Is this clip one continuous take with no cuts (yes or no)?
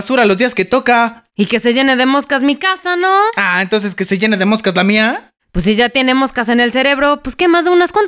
yes